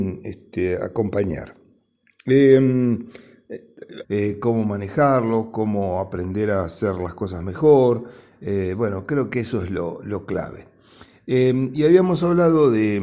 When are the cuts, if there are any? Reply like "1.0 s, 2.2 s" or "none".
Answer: 4.0 s